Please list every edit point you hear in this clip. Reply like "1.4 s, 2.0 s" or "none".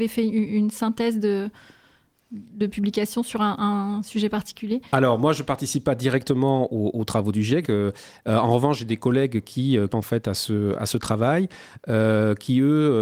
7.6 s, 9.9 s